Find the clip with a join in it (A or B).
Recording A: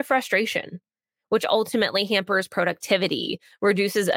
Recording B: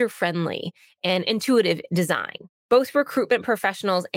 B